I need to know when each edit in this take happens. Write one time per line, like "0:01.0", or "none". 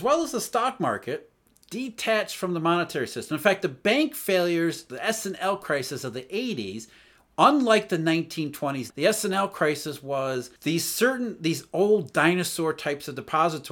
0:08.9
0:10.6